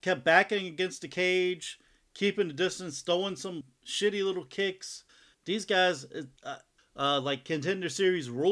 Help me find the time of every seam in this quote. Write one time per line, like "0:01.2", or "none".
0:05.3
0:06.8